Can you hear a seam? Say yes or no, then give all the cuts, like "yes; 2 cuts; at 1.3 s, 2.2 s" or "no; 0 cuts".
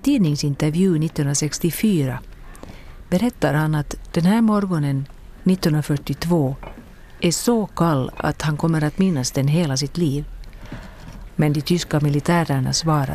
yes; 1 cut; at 11.3 s